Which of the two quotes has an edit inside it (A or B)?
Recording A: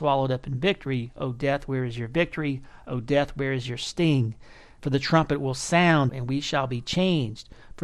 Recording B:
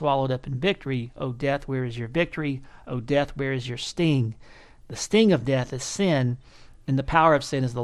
A